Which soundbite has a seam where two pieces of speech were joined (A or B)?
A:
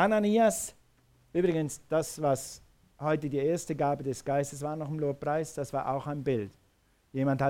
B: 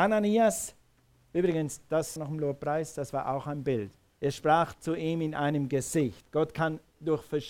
B